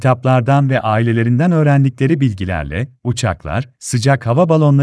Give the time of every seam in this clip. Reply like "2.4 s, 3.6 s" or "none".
3.8 s

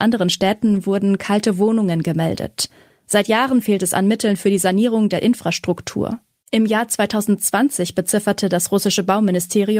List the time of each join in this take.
none

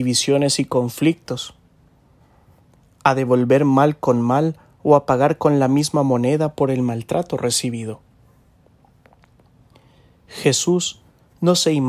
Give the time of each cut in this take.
none

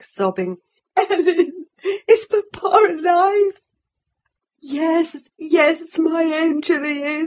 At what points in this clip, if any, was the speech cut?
0.9 s, 5.3 s

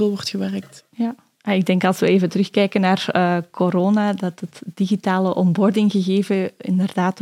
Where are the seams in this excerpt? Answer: none

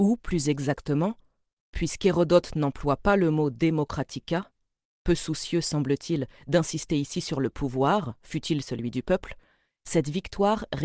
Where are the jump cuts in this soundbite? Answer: none

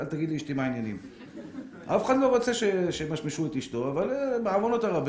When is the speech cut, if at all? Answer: none

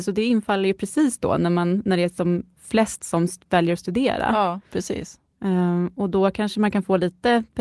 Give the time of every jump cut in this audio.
none

